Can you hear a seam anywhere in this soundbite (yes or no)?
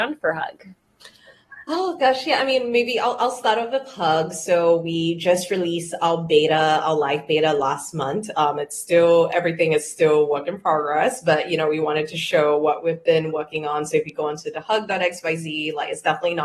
no